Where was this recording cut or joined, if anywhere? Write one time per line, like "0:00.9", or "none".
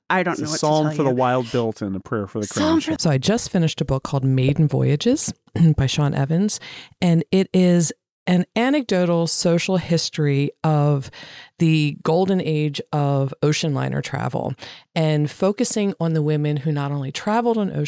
0:03.0